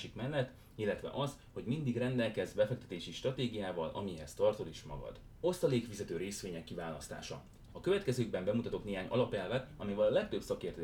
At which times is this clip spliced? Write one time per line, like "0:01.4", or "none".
0:07.7